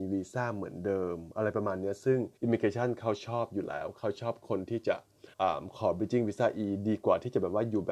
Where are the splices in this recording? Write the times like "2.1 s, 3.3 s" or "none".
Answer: 2.4 s, 5.3 s